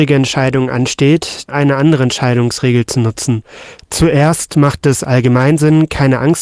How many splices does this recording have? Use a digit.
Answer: 1